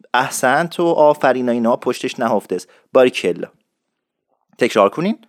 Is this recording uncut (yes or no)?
yes